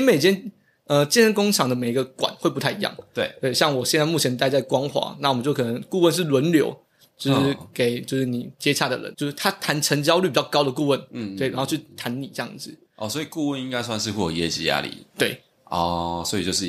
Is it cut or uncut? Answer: cut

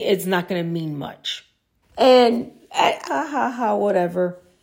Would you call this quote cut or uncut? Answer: cut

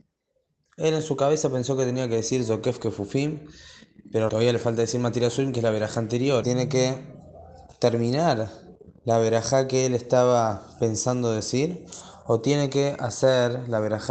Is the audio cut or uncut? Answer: cut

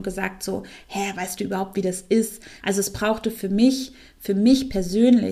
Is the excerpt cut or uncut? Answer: cut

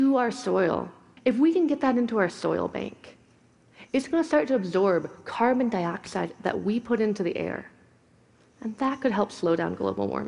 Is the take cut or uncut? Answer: cut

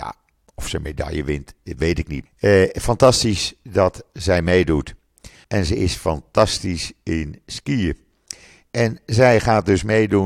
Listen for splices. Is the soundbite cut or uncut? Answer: cut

